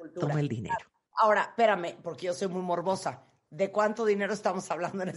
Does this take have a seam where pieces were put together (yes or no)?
no